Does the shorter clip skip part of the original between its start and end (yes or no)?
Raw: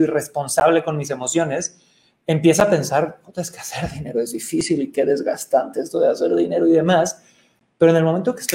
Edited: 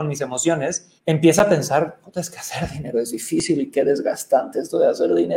yes